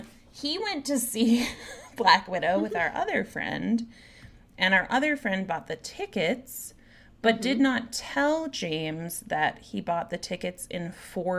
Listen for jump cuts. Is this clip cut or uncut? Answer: uncut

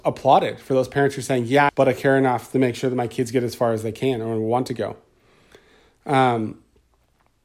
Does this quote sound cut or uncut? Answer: cut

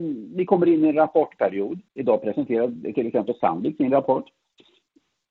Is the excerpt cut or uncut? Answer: cut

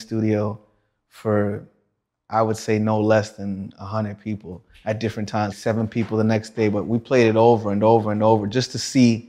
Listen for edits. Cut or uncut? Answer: cut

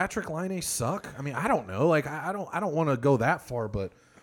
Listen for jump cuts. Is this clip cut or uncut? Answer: uncut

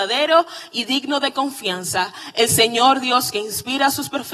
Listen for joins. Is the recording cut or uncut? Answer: uncut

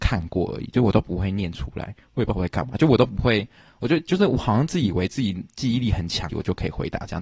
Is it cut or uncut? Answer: cut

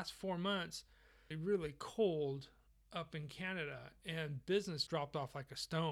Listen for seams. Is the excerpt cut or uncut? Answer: cut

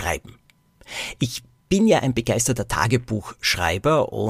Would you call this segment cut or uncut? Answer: uncut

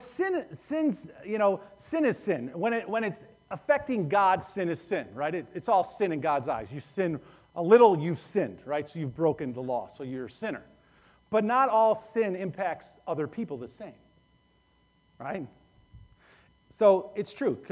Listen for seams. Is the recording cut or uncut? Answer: uncut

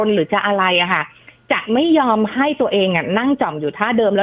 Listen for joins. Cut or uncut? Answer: uncut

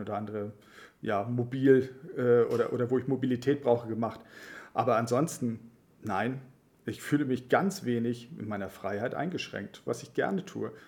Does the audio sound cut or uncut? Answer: cut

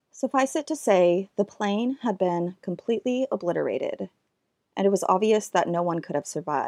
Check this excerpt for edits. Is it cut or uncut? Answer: uncut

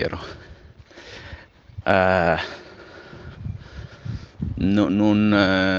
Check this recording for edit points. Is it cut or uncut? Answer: cut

